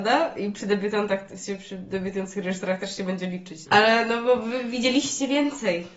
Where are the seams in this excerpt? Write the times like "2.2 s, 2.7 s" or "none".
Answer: 3.7 s